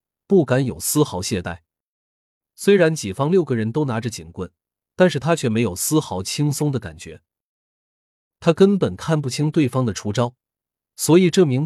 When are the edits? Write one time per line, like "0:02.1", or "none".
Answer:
0:08.4